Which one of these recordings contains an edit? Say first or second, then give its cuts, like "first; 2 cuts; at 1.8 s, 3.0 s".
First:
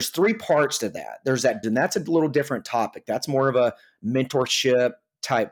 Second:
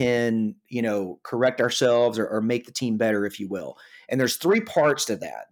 first; 1 cut; at 1.6 s